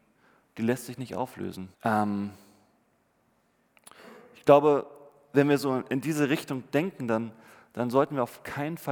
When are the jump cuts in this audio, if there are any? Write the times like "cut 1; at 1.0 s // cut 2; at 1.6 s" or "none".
cut 1; at 1.7 s